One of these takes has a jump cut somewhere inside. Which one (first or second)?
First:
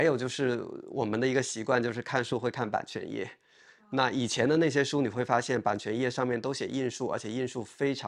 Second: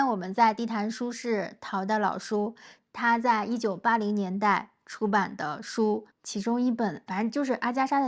second